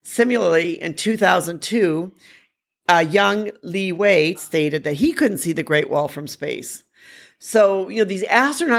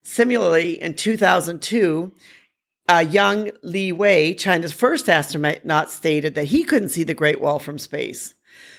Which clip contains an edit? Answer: first; 1 cut; at 4.3 s

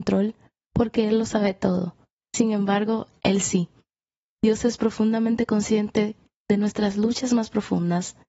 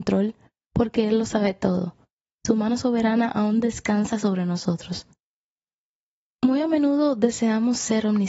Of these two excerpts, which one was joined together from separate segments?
first; 1 cut; at 2.2 s

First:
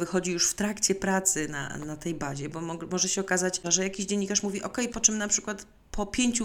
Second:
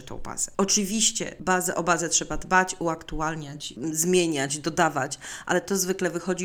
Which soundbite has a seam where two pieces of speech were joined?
first; 2 cuts; at 3.6 s, 4.9 s

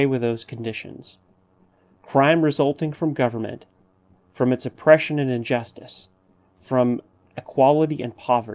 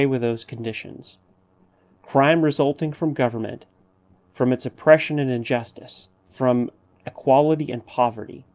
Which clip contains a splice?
second; 1 cut; at 6.2 s

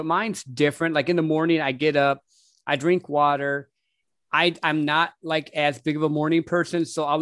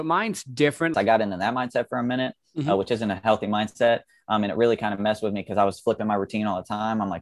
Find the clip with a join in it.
second; 1 cut; at 0.9 s

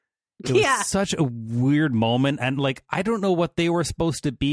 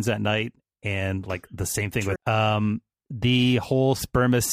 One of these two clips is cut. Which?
second; 1 cut; at 2.2 s

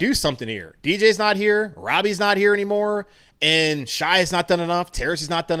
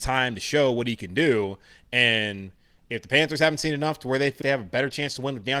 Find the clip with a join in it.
second; 1 cut; at 4.4 s

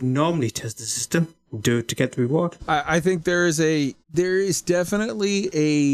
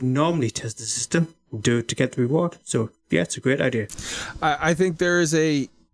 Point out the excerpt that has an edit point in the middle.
first; 2 cuts; at 2.6 s, 4.0 s

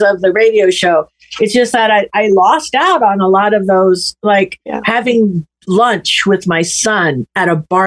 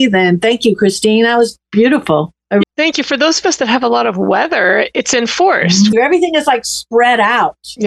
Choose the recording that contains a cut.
second; 2 cuts; at 2.6 s, 5.9 s

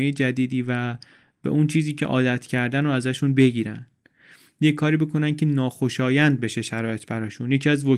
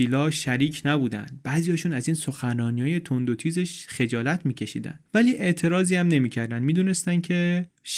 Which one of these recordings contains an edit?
second; 1 cut; at 5.0 s

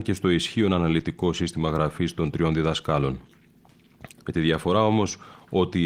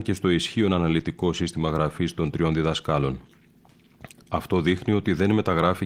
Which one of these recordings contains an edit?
first; 1 cut; at 4.2 s

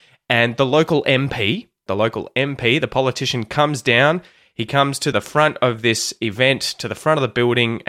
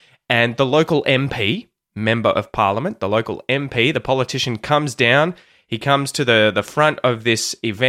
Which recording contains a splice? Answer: first; 2 cuts; at 1.9 s, 5.1 s

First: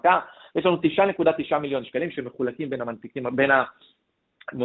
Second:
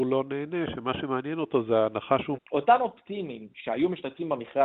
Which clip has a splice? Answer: second; 1 cut; at 2.4 s

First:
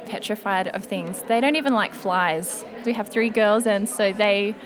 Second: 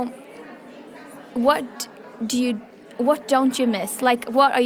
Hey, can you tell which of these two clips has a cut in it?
first; 1 cut; at 2.8 s

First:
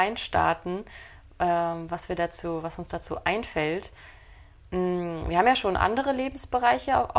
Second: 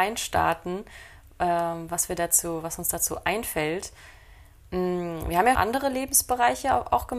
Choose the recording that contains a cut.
second; 1 cut; at 5.5 s

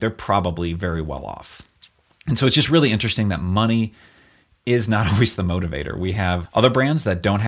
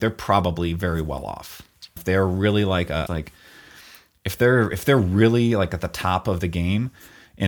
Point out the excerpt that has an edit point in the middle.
second; 2 cuts; at 2.0 s, 3.1 s

